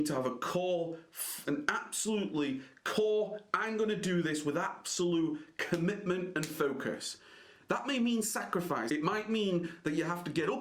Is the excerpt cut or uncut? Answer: cut